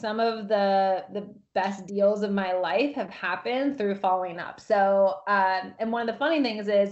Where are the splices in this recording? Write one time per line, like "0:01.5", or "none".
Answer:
none